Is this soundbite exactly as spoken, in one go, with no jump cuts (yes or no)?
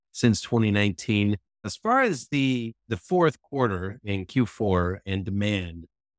no